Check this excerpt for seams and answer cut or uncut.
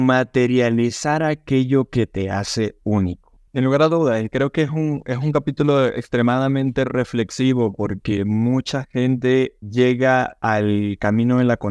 cut